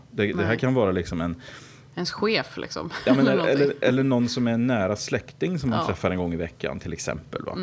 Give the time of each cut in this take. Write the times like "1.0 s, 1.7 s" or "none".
none